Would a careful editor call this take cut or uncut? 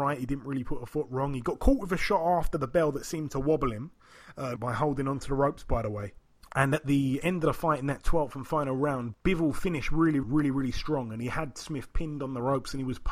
cut